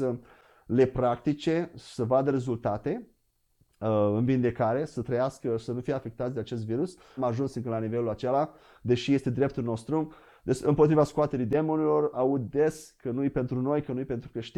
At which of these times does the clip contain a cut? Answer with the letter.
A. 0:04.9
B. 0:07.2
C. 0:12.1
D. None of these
B